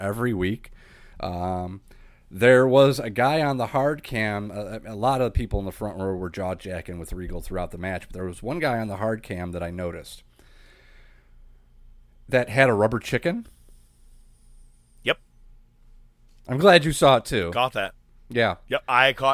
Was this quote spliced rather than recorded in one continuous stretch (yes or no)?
no